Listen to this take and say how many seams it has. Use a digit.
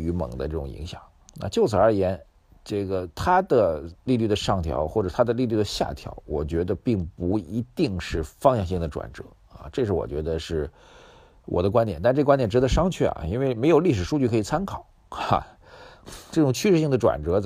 0